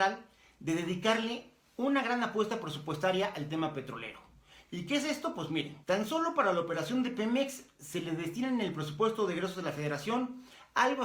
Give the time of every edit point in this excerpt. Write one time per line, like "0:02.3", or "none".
0:05.8